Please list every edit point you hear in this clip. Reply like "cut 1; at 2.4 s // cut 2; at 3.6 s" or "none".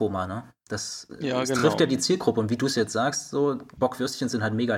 none